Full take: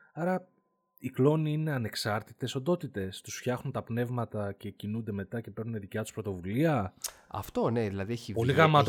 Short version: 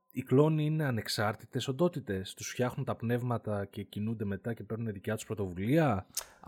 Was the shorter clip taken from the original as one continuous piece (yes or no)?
yes